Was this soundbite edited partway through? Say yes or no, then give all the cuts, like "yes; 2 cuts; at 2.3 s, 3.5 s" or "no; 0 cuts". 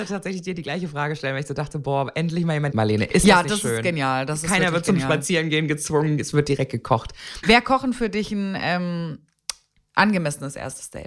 yes; 2 cuts; at 2.7 s, 7.4 s